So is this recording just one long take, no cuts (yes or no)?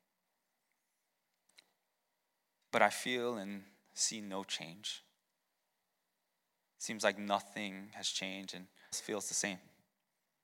no